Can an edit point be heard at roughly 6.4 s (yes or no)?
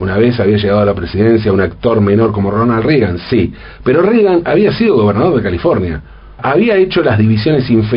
yes